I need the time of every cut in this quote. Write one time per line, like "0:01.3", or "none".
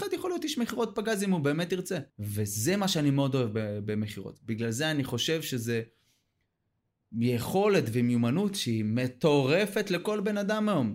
0:02.1